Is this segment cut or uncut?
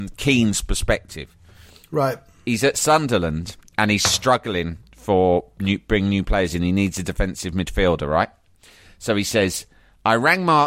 uncut